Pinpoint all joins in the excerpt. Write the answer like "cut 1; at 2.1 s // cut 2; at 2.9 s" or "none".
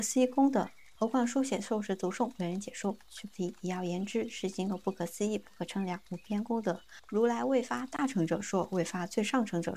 cut 1; at 1.0 s

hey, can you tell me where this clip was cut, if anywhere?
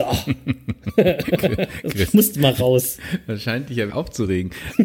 cut 1; at 3.9 s

